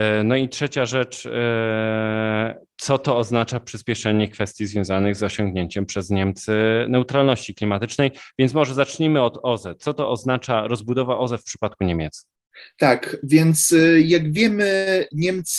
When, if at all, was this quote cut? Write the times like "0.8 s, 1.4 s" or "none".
none